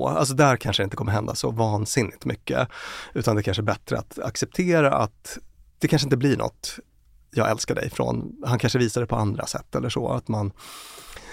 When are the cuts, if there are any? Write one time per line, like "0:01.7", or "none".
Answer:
none